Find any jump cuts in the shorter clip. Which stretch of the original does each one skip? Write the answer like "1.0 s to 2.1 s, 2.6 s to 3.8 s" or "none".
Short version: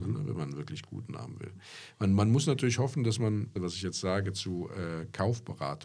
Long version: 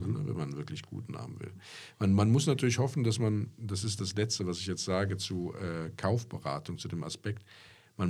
3.6 s to 4.4 s